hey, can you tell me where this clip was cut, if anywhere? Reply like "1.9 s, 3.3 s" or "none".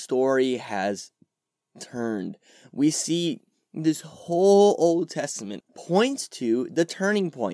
5.6 s